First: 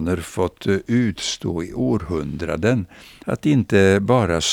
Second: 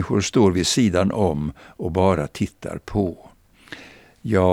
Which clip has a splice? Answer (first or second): first